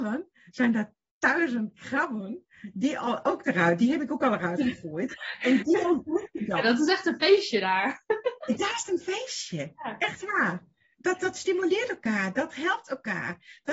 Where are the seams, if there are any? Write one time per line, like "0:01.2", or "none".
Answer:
0:06.6